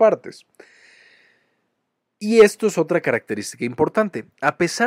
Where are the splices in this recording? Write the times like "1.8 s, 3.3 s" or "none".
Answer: none